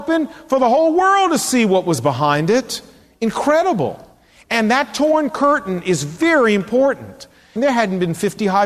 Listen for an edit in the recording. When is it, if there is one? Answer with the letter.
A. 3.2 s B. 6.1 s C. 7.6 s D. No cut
C